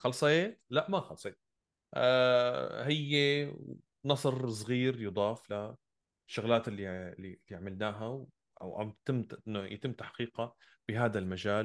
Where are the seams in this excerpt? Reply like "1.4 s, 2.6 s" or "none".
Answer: none

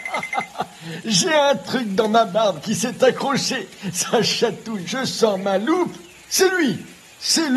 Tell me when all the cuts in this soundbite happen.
4.9 s

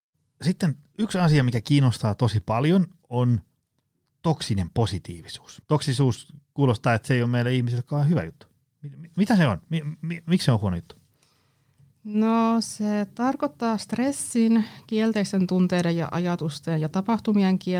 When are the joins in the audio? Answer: 5.6 s

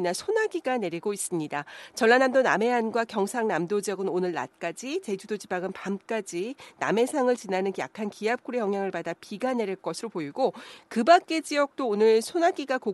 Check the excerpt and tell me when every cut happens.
none

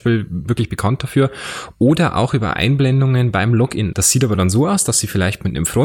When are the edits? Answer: 3.9 s

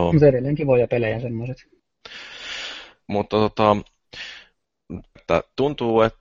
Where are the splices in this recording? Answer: 3.0 s, 5.2 s

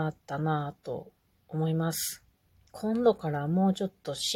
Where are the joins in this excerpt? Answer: 2.7 s

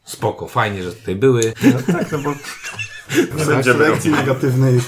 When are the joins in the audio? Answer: 1.5 s, 3.3 s

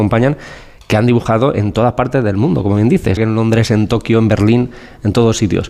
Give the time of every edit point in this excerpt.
3.2 s

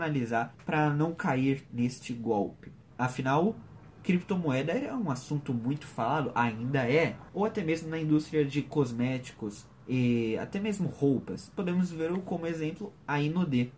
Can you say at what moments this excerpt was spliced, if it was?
2.9 s

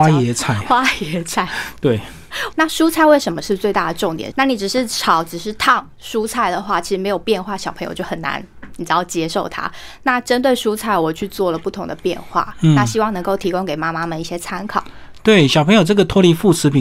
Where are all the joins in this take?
2.5 s, 4.3 s

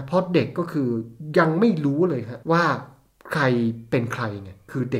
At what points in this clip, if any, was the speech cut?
2.4 s

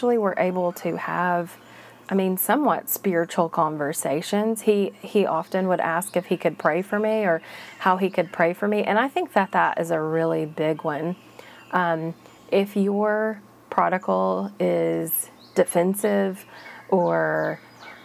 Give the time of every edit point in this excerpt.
none

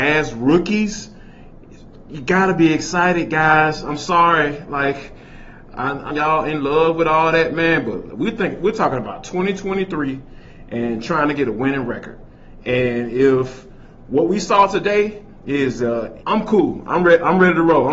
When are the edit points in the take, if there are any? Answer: 6.1 s, 16.2 s

